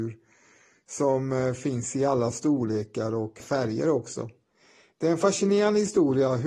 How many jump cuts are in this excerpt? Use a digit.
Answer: 1